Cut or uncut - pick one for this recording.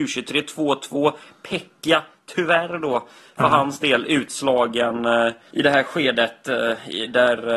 cut